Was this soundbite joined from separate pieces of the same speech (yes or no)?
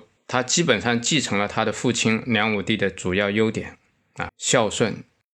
yes